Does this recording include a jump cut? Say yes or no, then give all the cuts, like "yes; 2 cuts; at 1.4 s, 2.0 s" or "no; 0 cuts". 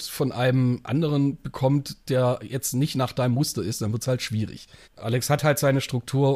no; 0 cuts